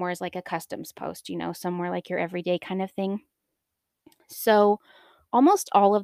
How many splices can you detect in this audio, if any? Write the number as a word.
zero